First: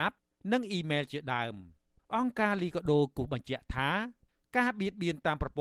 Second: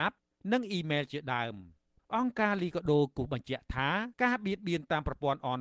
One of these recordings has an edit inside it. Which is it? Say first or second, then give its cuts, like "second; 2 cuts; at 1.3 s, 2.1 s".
second; 1 cut; at 4.1 s